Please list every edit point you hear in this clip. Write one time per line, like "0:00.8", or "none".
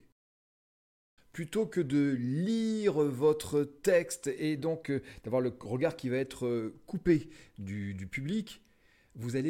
0:01.2